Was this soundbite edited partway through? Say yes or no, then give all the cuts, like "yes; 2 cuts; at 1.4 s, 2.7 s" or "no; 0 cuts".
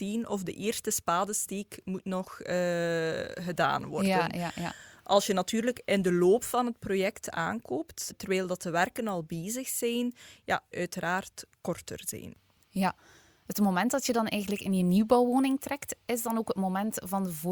yes; 2 cuts; at 8.1 s, 10.7 s